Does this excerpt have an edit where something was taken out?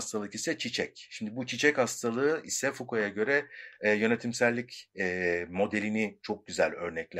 no; 0 cuts

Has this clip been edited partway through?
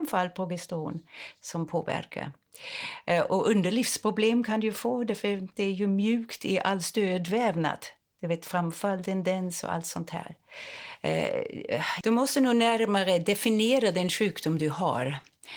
yes; 2 cuts; at 3.3 s, 12.0 s

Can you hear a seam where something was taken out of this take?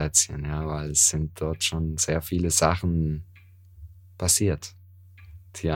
no; 0 cuts

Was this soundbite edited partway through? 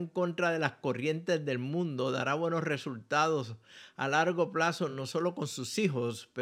no; 0 cuts

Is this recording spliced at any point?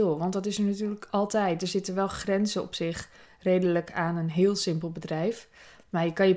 no; 0 cuts

